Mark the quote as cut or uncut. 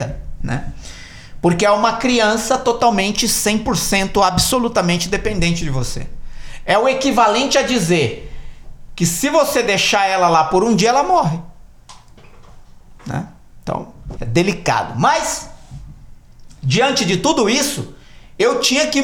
cut